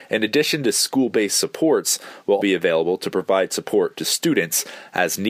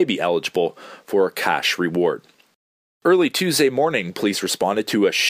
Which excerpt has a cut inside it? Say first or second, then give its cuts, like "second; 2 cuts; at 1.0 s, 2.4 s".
first; 1 cut; at 2.4 s